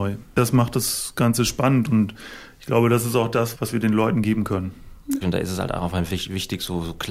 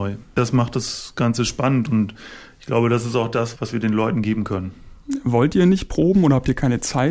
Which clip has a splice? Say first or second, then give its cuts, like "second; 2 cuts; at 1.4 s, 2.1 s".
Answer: first; 1 cut; at 5.2 s